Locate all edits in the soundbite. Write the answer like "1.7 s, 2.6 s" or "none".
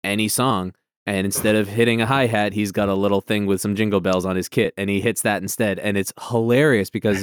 none